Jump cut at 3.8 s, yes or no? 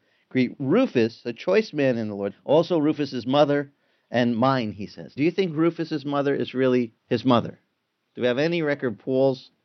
no